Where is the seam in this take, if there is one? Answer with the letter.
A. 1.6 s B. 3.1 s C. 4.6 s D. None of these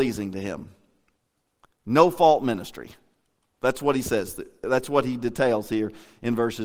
D